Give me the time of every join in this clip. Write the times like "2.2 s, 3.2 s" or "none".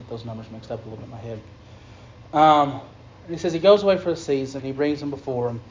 4.6 s